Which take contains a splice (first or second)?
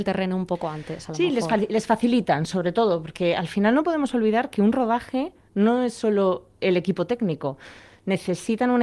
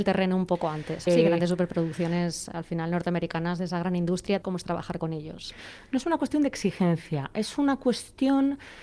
second